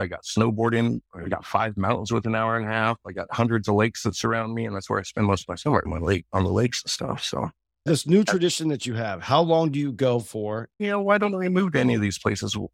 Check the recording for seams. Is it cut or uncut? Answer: cut